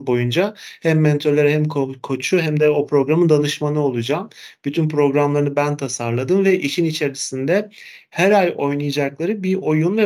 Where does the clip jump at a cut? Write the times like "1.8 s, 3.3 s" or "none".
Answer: none